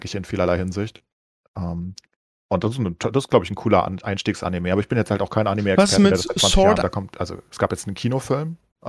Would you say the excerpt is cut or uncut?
cut